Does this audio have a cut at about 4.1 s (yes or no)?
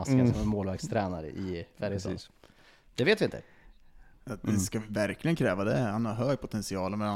yes